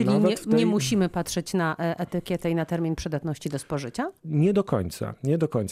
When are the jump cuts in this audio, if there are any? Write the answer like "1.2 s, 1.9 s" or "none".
none